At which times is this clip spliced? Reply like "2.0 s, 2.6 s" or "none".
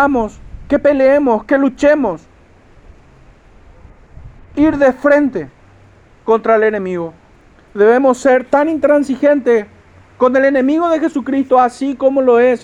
none